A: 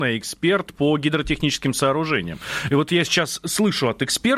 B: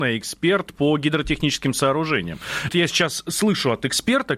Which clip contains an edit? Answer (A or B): B